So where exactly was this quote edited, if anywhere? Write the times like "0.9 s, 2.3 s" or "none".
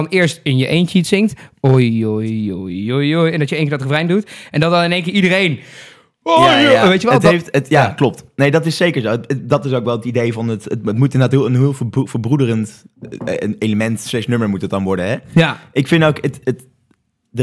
none

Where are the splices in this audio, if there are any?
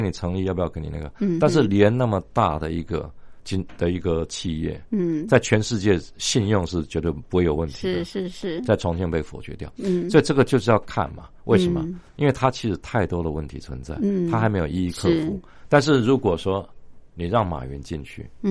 none

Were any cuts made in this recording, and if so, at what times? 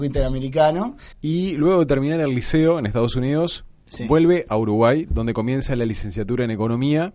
1.1 s

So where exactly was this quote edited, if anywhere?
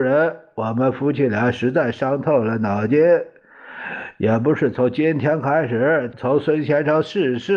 6.1 s

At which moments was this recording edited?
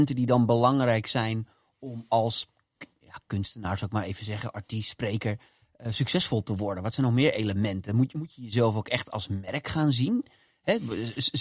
none

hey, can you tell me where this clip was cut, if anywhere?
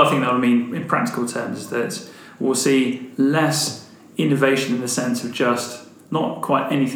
none

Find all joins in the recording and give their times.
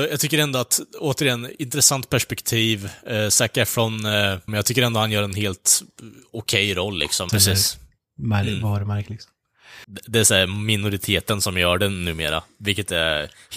4.5 s, 7.3 s, 9.8 s

